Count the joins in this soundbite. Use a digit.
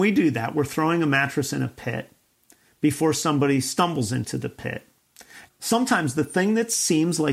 1